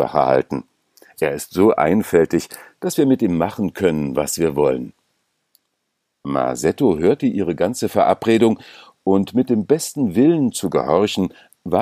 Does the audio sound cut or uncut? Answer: uncut